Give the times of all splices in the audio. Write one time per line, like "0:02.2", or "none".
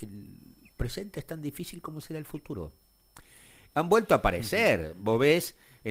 0:03.7